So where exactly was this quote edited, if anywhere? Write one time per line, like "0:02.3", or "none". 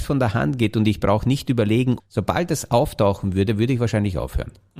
0:02.0